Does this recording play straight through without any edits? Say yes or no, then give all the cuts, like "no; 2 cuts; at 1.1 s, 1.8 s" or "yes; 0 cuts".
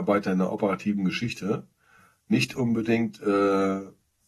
yes; 0 cuts